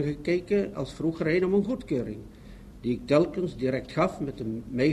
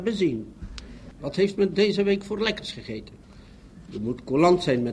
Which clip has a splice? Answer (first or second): second